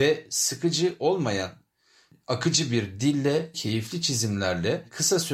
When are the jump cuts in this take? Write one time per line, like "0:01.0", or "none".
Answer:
0:03.5